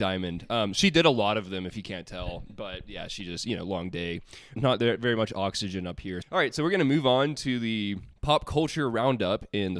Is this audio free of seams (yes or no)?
no